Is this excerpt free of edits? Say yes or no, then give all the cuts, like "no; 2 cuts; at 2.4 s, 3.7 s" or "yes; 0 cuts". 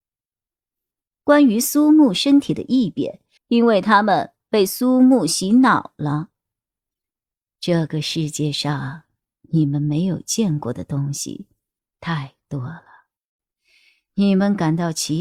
no; 1 cut; at 3.4 s